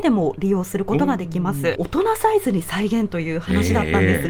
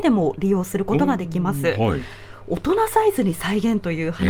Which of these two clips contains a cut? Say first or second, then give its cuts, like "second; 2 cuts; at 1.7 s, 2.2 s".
first; 1 cut; at 1.7 s